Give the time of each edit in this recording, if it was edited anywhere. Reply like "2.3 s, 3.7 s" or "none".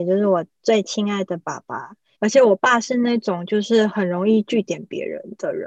2.2 s